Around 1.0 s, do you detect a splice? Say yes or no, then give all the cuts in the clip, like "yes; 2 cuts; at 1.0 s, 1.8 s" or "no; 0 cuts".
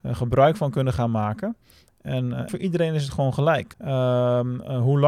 no; 2 cuts; at 2.5 s, 3.7 s